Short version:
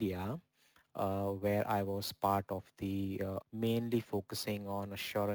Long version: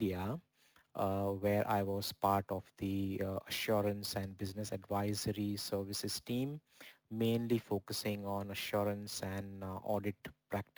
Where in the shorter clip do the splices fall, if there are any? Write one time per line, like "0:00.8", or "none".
0:03.4